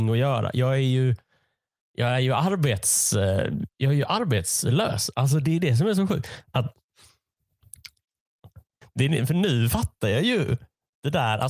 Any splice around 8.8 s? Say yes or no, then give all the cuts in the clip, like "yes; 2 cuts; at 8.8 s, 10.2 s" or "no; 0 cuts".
yes; 1 cut; at 8.8 s